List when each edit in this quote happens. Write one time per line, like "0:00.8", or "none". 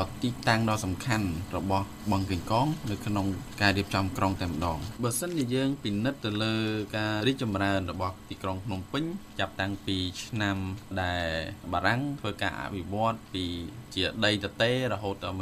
0:07.2